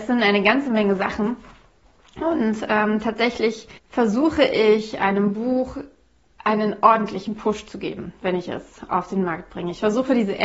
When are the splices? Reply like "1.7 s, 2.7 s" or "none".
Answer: 3.8 s

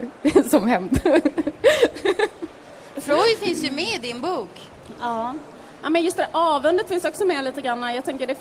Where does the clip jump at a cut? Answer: none

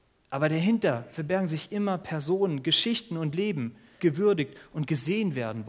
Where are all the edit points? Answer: 4.0 s

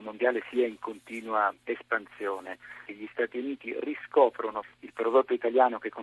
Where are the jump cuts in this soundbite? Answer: 2.8 s, 4.6 s

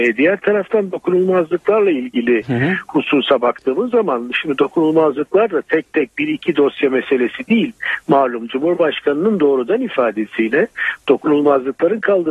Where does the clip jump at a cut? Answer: none

